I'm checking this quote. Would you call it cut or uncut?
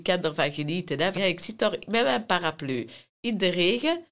cut